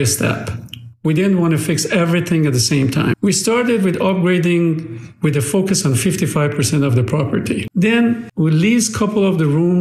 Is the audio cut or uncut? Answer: cut